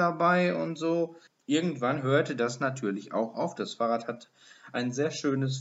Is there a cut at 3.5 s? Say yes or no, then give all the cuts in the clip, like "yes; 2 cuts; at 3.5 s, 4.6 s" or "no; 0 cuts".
no; 1 cut; at 1.3 s